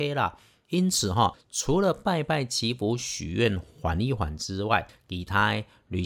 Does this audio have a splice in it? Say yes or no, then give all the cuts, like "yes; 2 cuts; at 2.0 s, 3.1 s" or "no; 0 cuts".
no; 0 cuts